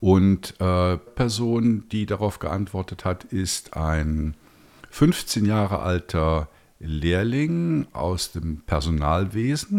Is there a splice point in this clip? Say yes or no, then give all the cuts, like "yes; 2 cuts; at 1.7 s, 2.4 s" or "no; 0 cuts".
yes; 1 cut; at 1.1 s